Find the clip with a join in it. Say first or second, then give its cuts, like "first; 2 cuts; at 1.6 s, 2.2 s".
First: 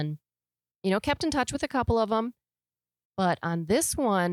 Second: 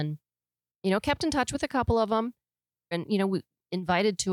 second; 1 cut; at 2.9 s